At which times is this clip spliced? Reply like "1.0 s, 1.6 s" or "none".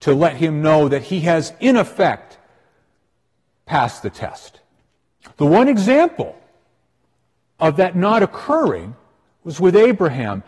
5.2 s